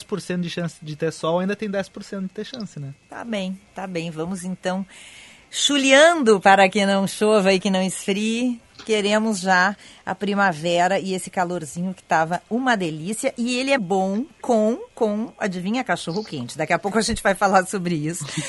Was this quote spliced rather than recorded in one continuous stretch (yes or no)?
yes